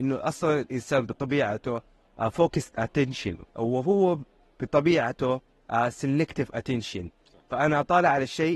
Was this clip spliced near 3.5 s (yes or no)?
yes